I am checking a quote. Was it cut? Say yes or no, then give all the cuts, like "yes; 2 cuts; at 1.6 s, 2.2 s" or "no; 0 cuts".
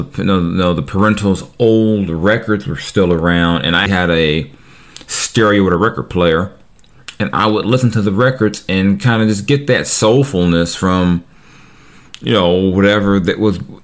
yes; 1 cut; at 3.9 s